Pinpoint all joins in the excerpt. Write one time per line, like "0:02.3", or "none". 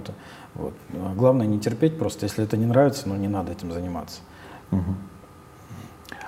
0:04.6